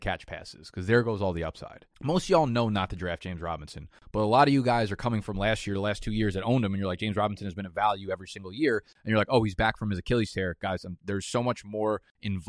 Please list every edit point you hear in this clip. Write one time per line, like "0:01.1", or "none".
0:01.9